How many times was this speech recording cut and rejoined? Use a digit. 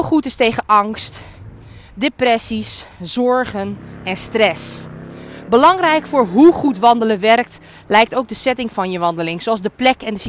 0